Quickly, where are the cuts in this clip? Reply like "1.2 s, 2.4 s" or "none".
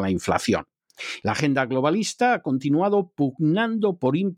1.2 s

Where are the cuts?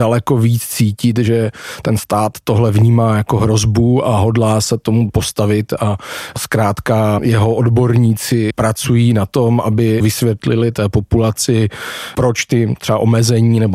none

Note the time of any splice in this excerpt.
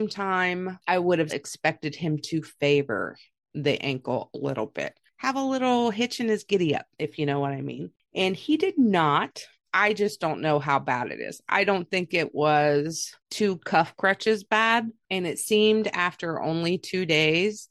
1.3 s, 9.5 s

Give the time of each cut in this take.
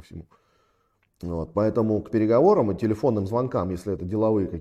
1.0 s

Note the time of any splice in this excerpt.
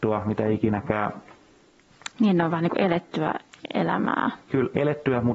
2.1 s

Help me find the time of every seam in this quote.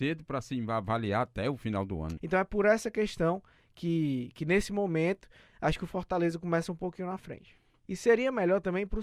2.2 s, 7.8 s

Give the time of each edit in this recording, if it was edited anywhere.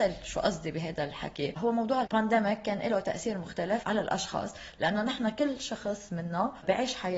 2.0 s

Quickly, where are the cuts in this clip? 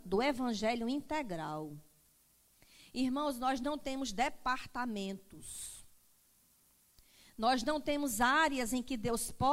none

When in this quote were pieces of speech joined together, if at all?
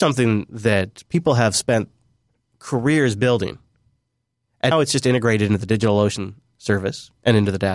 4.7 s

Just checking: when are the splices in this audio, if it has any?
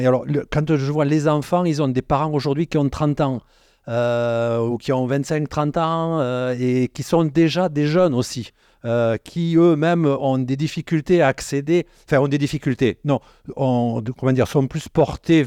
none

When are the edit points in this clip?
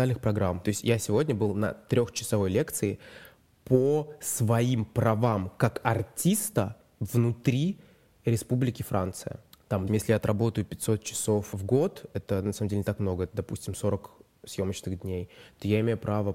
9.9 s

